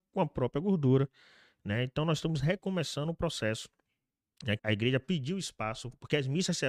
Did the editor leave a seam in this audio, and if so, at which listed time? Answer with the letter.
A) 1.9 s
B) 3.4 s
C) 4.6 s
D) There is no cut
C